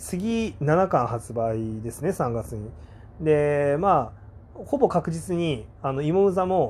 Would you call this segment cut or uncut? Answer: uncut